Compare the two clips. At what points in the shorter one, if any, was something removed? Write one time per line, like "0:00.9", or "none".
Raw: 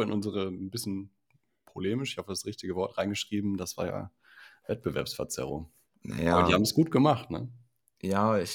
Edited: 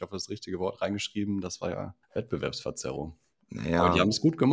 0:02.0